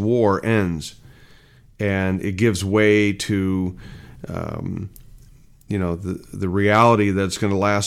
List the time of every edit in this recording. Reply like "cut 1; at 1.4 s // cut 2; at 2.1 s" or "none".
none